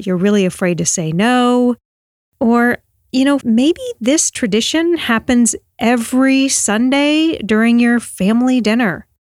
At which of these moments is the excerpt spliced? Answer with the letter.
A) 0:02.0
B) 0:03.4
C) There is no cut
B